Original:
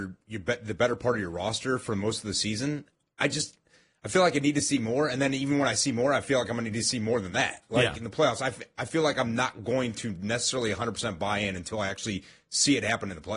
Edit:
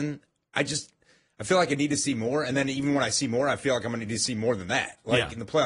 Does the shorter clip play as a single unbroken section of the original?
yes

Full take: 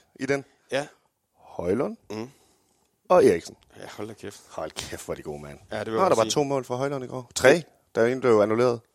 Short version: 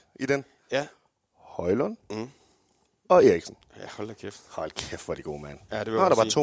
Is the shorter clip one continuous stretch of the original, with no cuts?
yes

